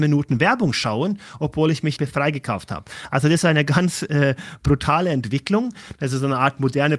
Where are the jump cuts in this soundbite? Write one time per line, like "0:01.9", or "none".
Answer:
0:02.0
0:05.9